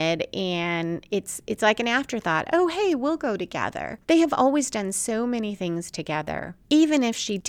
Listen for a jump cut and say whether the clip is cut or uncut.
uncut